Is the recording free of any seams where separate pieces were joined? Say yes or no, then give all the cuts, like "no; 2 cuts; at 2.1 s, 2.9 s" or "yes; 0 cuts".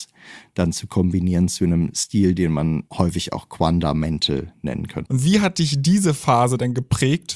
no; 2 cuts; at 2.9 s, 5.1 s